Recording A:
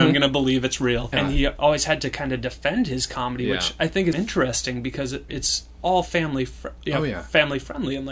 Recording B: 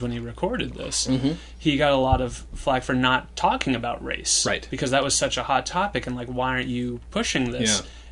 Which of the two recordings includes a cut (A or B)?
A